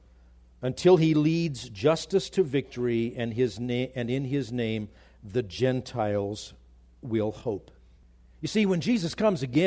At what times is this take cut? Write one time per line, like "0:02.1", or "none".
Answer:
none